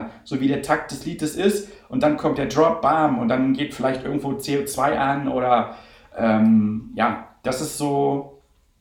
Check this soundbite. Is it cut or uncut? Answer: uncut